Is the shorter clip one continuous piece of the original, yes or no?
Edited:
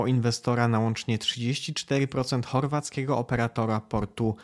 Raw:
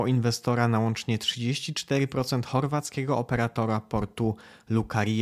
yes